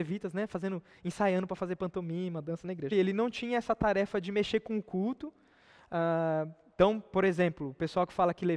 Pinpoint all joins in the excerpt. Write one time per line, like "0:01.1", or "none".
0:02.9